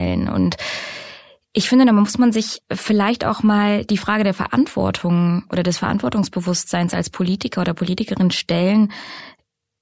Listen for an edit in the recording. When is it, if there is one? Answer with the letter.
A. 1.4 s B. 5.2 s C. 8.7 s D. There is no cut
D